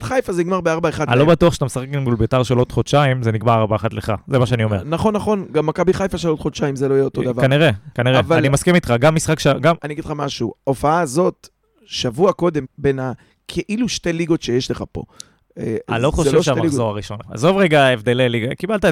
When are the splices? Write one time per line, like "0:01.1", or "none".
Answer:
0:09.8
0:12.6
0:17.2